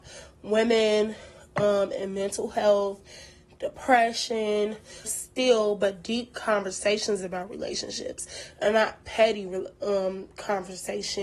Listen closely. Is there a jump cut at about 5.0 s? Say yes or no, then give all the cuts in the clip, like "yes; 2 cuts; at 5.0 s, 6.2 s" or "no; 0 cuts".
yes; 1 cut; at 5.0 s